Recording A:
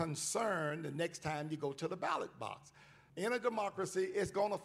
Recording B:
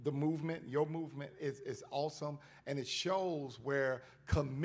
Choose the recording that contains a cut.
A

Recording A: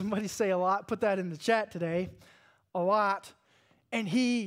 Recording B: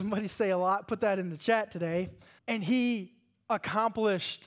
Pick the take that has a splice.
B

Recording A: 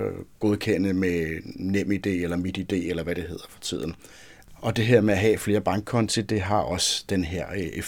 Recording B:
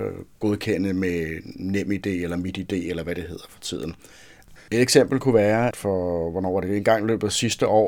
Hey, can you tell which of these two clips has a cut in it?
B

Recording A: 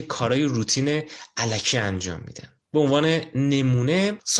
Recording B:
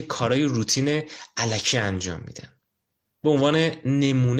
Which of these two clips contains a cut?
A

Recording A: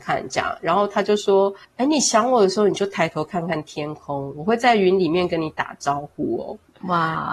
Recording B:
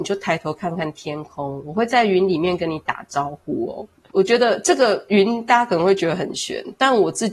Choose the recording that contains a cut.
B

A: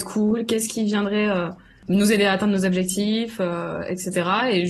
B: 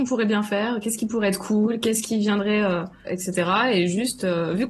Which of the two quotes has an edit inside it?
B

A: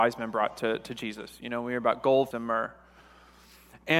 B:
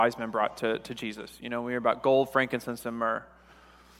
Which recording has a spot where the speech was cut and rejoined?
A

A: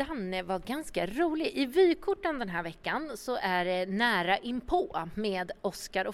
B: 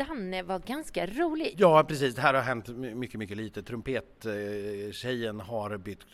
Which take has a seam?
B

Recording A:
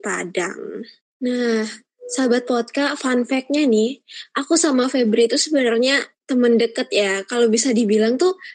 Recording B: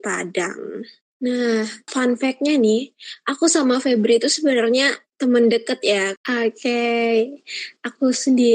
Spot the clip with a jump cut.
B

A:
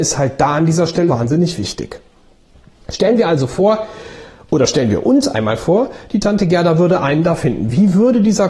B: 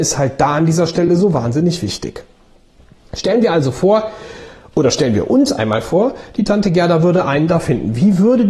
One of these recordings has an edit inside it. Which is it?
A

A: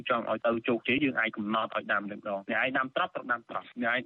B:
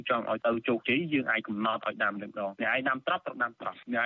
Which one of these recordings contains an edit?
A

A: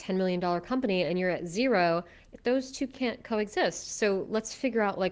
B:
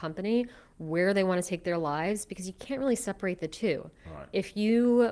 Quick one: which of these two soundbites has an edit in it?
A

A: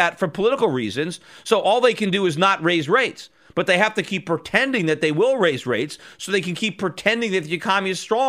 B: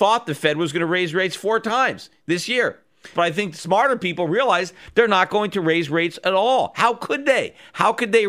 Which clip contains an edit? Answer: B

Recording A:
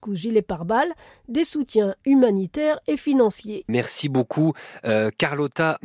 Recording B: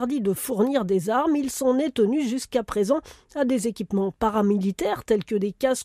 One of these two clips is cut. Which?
A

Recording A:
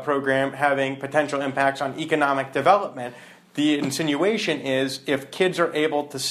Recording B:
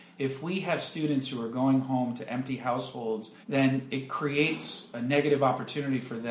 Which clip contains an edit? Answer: B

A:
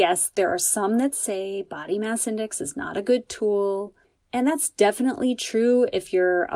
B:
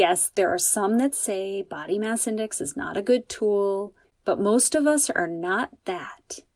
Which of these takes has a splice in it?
B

